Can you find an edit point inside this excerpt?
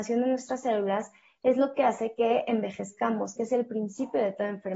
yes; 1 cut; at 3.4 s

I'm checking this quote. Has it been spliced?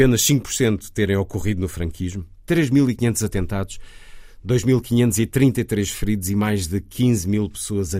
no; 0 cuts

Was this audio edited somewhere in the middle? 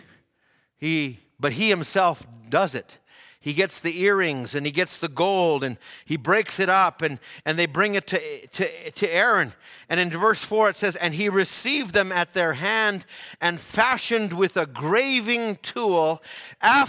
no; 0 cuts

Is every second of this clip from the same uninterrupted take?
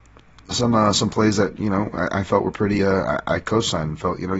yes; 0 cuts

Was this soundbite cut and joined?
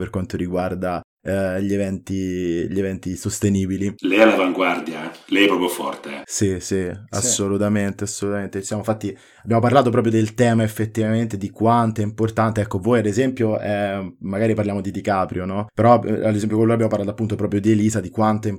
no; 0 cuts

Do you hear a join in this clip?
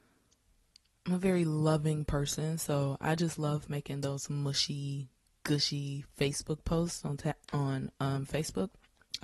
no; 0 cuts

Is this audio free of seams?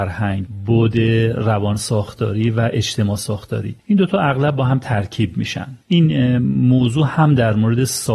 no; 2 cuts; at 3.8 s, 5.8 s

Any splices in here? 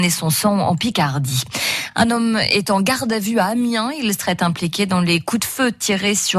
no; 0 cuts

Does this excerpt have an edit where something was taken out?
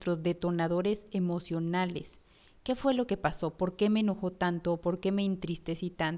no; 0 cuts

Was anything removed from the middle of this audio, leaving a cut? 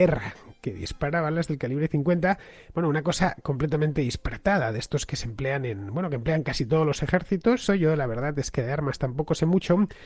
yes; 1 cut; at 7.7 s

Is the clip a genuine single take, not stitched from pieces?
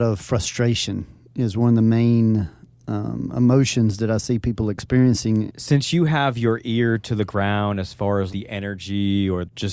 no; 2 cuts; at 5.5 s, 8.3 s

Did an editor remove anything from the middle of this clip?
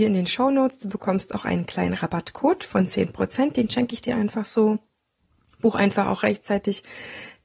no; 0 cuts

